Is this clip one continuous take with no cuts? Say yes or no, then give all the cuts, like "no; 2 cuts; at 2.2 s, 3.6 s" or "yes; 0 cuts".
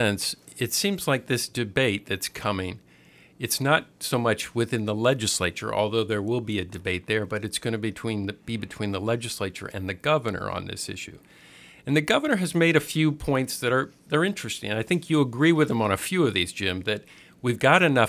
yes; 0 cuts